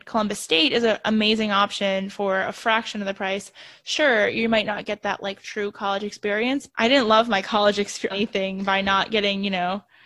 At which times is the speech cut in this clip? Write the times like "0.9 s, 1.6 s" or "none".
6.7 s, 8.1 s